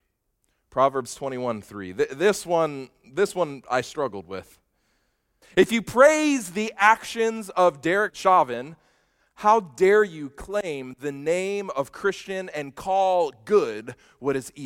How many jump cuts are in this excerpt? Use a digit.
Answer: 2